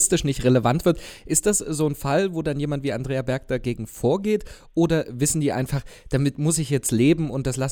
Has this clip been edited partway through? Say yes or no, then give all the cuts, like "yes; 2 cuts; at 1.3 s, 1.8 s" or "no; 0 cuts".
no; 0 cuts